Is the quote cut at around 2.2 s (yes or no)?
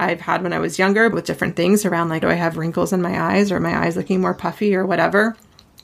yes